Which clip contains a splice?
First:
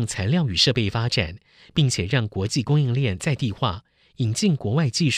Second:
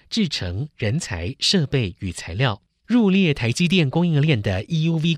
second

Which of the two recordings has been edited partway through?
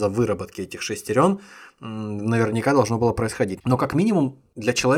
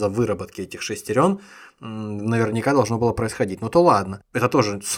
first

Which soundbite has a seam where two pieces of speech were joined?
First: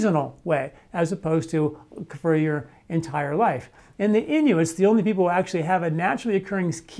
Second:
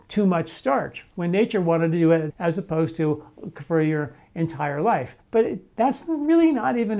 second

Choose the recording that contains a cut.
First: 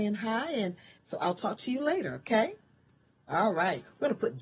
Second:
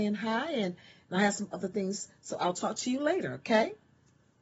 first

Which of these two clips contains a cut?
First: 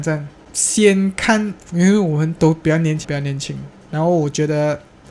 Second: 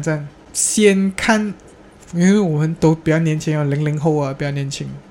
first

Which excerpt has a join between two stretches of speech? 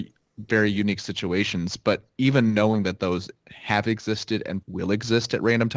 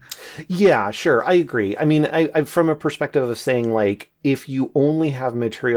first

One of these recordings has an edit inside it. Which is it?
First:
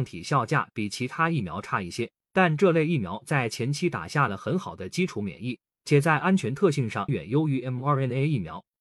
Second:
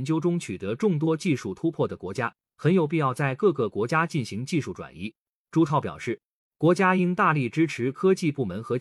first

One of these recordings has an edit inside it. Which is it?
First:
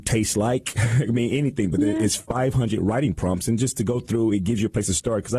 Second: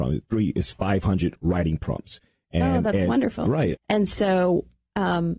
second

